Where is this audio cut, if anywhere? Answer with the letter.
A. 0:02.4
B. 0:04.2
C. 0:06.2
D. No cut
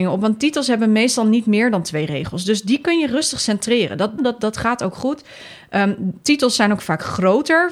B